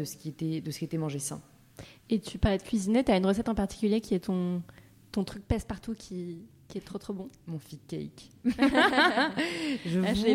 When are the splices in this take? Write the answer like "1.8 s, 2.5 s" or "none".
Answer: none